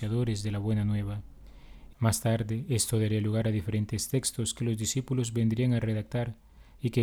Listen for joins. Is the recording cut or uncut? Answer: cut